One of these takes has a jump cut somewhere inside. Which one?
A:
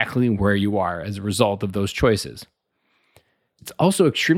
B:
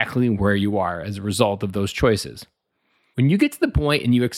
B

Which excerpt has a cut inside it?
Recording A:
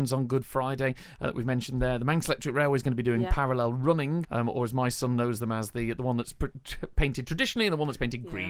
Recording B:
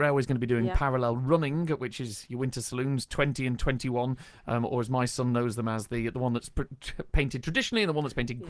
A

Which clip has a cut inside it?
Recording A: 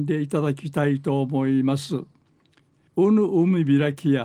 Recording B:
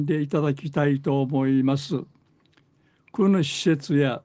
A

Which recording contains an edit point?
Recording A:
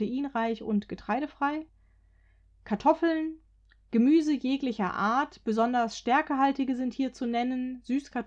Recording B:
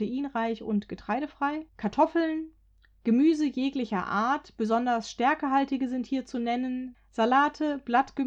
B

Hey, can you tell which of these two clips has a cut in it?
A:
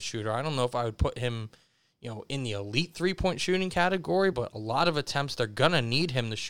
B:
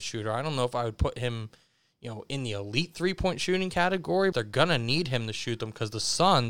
B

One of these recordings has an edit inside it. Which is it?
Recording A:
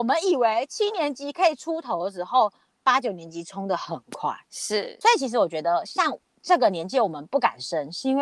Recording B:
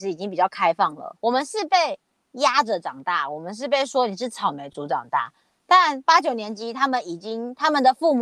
B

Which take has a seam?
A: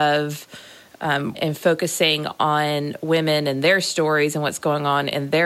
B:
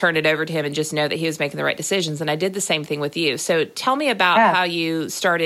A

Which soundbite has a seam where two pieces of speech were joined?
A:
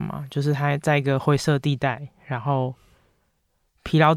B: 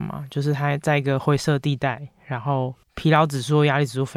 B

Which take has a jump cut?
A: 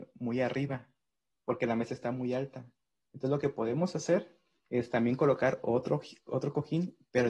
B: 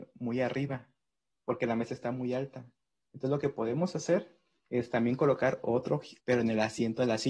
B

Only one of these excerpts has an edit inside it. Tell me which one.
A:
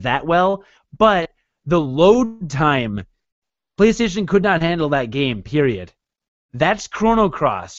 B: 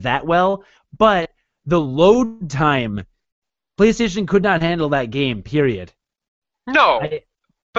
A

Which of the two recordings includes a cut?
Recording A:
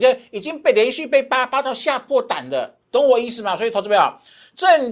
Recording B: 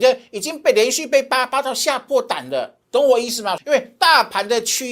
B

